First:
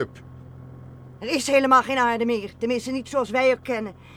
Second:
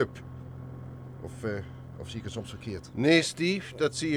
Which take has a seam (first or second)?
first